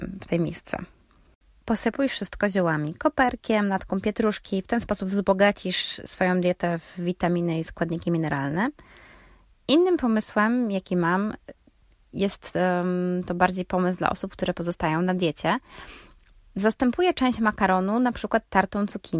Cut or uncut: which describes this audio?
uncut